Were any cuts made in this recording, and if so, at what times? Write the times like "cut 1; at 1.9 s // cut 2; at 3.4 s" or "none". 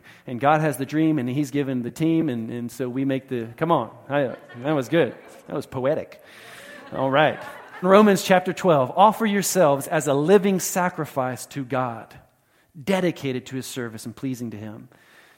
cut 1; at 7.8 s